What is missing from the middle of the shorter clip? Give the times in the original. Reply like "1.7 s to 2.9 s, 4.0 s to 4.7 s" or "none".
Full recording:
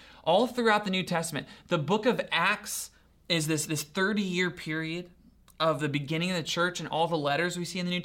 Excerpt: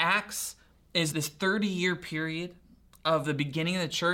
3.5 s to 3.7 s

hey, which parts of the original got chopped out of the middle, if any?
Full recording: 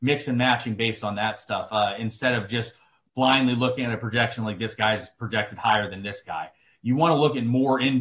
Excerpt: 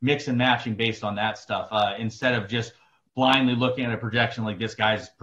none

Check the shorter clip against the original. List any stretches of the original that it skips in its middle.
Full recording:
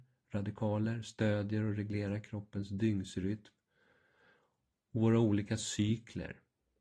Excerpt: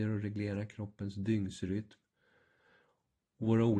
none

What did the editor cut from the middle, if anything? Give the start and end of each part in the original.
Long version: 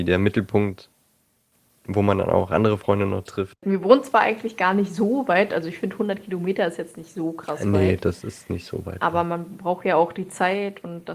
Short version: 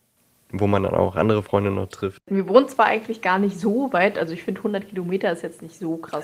none

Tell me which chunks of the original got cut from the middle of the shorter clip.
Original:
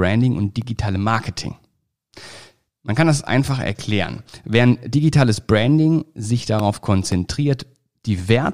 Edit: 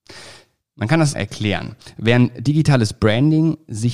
3.2 s to 3.6 s

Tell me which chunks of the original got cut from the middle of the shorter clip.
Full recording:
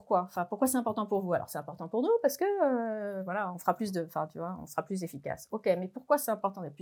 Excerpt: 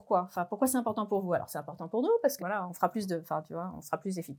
2.4 s to 3.2 s

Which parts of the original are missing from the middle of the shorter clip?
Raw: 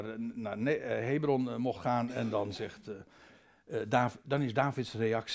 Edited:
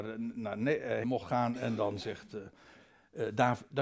1.0 s to 1.6 s

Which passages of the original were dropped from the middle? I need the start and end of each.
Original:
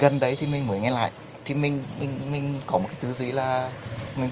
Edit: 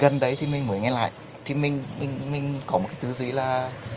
none

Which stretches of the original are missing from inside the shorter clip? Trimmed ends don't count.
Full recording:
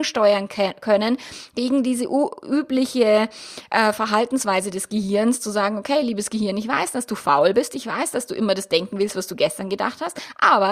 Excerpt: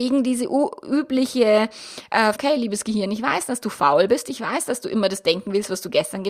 3.9 s to 5.8 s

